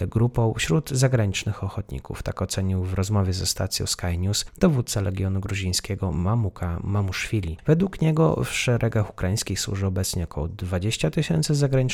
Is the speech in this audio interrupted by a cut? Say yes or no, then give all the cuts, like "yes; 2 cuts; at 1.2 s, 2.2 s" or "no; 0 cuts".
no; 0 cuts